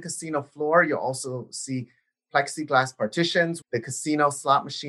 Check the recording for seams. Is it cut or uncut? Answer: cut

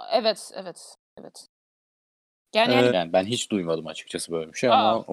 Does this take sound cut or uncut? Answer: cut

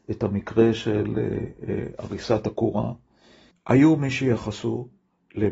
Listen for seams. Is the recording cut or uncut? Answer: cut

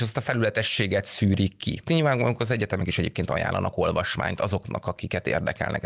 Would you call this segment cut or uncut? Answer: cut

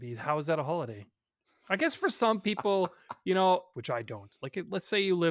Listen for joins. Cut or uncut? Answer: cut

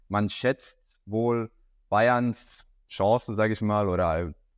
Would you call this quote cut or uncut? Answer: uncut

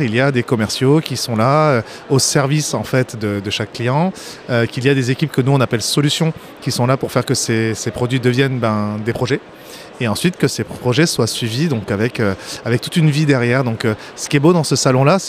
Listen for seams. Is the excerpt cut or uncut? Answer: uncut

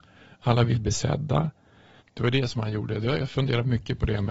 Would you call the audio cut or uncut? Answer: cut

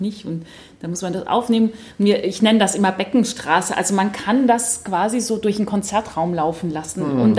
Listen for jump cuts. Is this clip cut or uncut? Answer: uncut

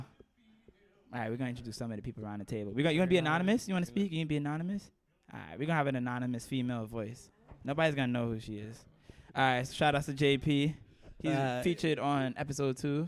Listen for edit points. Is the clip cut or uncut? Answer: uncut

